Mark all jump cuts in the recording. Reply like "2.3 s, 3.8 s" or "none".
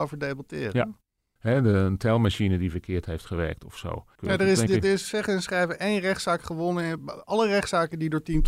1.4 s, 4.2 s